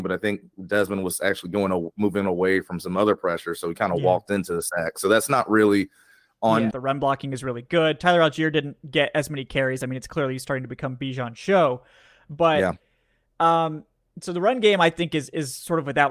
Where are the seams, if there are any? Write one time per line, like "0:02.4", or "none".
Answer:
0:06.7